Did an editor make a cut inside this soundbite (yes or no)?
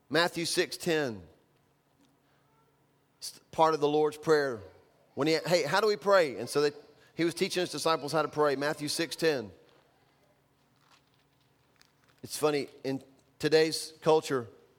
no